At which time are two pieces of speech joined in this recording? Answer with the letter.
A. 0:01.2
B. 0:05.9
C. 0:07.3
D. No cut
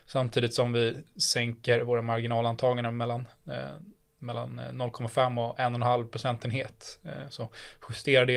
D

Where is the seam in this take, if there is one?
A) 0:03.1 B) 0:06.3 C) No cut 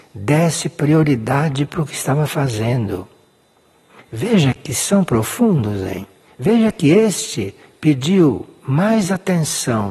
C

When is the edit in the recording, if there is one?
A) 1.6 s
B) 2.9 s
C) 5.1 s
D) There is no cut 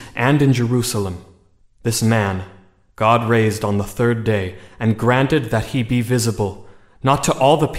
A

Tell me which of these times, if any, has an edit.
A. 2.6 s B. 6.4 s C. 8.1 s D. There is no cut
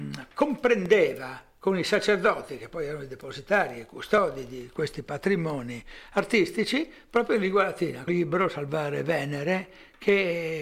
C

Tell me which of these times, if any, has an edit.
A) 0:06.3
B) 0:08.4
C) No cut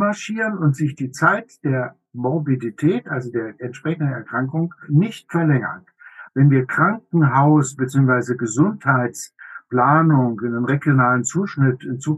A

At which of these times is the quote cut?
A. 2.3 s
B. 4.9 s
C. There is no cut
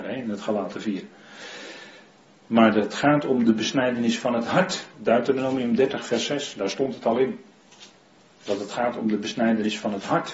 B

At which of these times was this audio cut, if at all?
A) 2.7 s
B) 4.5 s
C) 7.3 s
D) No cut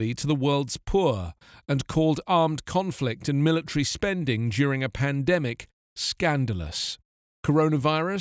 D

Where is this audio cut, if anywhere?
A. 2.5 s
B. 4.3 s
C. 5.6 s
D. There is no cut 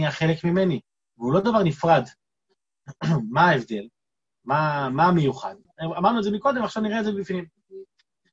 C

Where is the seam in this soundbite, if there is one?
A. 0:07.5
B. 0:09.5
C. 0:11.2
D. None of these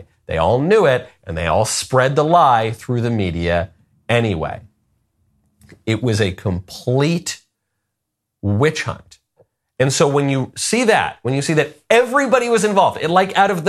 D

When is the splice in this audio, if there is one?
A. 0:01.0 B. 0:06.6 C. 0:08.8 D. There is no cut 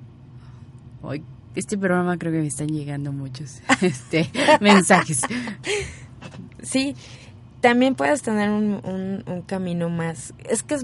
D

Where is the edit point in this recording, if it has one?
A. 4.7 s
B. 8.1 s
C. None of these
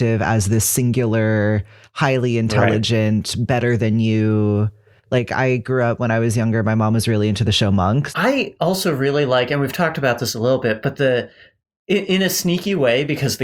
B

